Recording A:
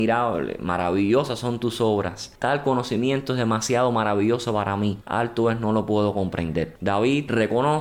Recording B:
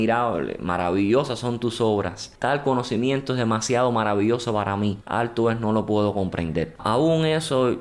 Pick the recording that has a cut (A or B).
B